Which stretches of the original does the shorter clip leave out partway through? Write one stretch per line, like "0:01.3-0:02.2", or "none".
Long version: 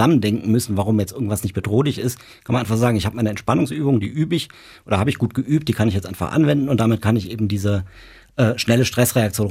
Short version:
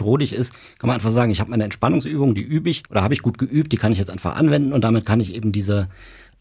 0:04.5-0:04.8